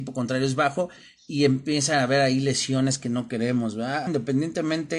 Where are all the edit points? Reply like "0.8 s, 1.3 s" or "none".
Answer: 4.1 s